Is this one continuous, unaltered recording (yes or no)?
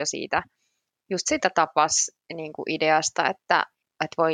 yes